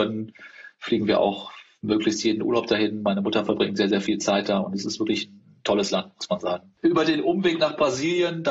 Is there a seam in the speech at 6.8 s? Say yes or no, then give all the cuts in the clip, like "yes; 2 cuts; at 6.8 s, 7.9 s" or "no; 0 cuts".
yes; 1 cut; at 6.8 s